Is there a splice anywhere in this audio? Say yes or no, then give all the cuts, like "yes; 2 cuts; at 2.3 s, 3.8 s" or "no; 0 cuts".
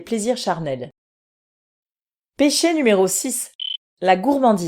no; 0 cuts